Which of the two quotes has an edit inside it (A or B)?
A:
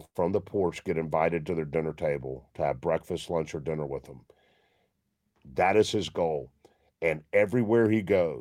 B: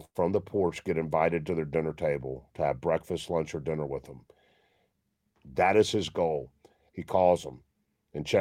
B